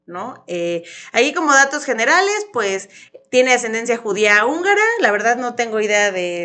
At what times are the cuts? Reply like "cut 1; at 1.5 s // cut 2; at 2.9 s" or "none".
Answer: none

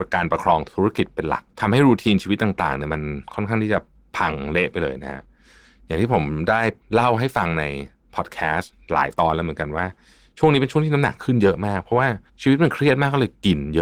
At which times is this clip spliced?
cut 1; at 1.5 s // cut 2; at 6.8 s // cut 3; at 12.3 s

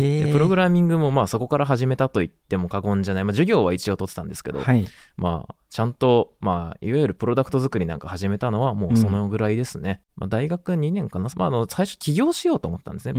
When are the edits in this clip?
cut 1; at 10.1 s // cut 2; at 11.3 s

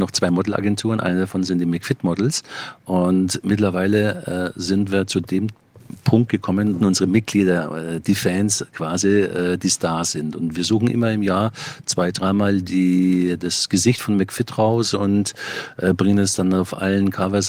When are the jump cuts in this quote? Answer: cut 1; at 6.8 s

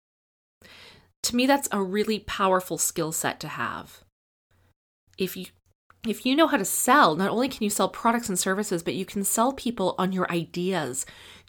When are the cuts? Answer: none

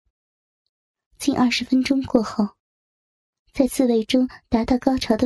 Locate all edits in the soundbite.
none

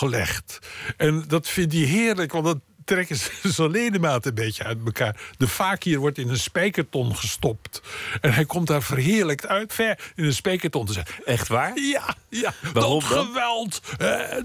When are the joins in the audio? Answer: cut 1; at 9.7 s // cut 2; at 11.2 s

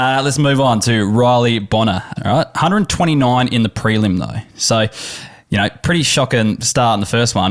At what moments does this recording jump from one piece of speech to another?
cut 1; at 2.2 s

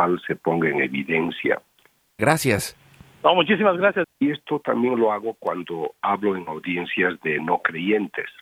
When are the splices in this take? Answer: cut 1; at 2.2 s // cut 2; at 4.0 s

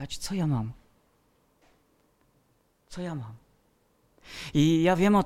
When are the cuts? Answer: none

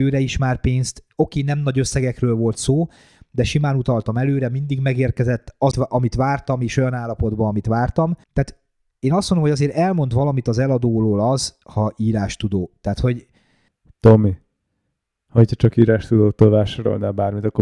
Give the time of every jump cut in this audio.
cut 1; at 5.7 s // cut 2; at 8.2 s

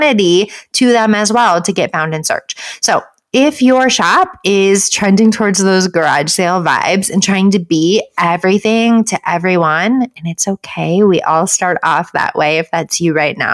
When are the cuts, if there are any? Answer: none

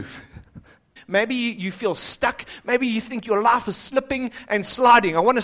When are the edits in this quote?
cut 1; at 1.0 s

